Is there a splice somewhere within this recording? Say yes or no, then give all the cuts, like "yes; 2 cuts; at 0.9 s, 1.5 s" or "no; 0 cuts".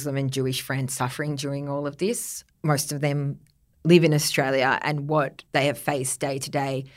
yes; 2 cuts; at 2.5 s, 5.5 s